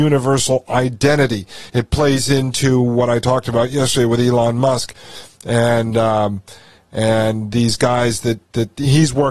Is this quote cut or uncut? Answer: uncut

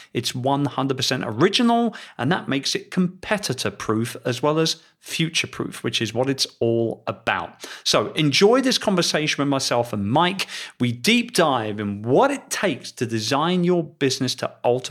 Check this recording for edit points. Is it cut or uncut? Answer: uncut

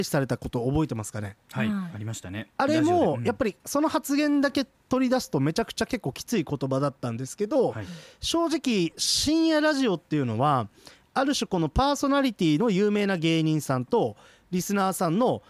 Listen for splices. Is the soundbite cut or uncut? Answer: uncut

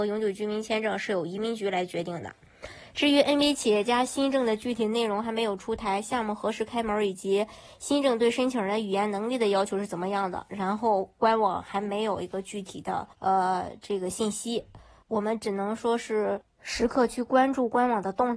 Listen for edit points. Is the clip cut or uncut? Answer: cut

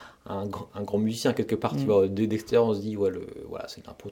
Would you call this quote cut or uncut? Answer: uncut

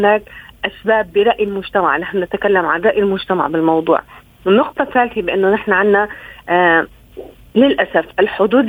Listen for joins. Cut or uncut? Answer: uncut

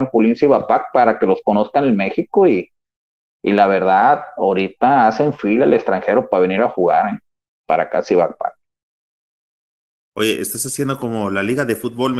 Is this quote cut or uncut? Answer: uncut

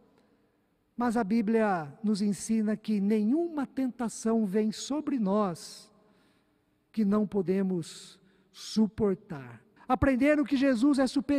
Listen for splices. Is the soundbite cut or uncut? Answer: cut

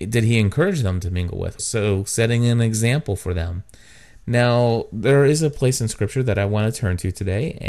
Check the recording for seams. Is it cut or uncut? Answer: cut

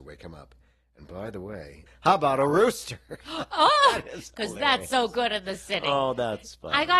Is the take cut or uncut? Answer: cut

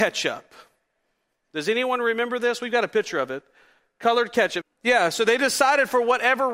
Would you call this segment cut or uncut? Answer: cut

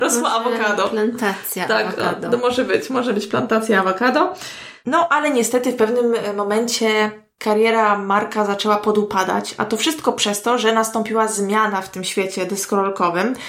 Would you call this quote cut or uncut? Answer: uncut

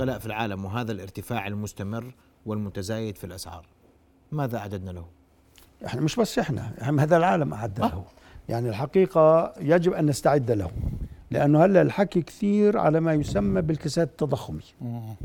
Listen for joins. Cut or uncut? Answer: uncut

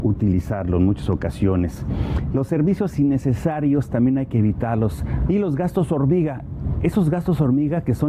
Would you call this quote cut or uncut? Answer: cut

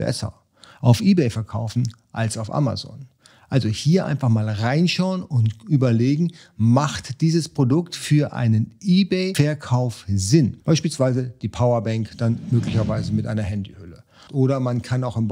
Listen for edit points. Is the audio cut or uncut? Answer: cut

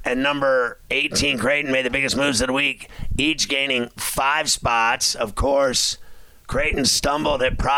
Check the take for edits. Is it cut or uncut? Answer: uncut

